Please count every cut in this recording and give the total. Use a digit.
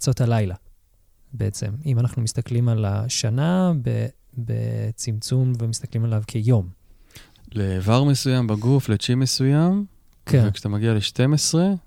1